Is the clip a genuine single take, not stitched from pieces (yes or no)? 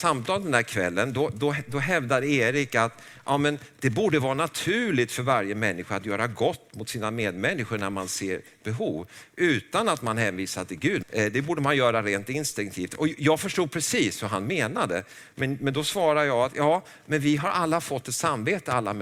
no